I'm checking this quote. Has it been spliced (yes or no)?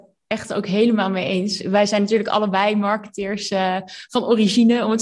no